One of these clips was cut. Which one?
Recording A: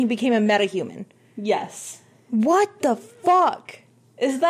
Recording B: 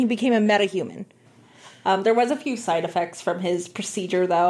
B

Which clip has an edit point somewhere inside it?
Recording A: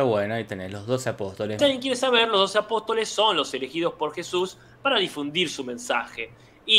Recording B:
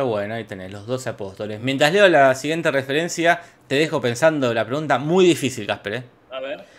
A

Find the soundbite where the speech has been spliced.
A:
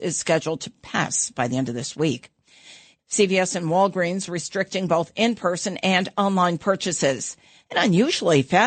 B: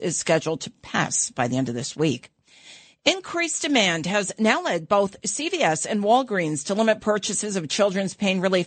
A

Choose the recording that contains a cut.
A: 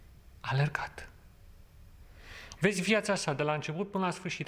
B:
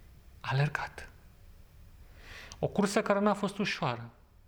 A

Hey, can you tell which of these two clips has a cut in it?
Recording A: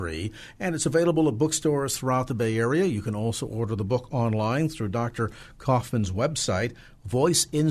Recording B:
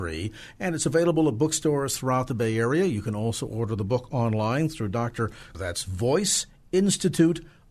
B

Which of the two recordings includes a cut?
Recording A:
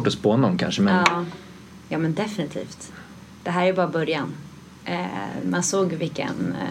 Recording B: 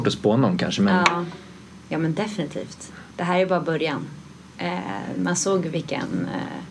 B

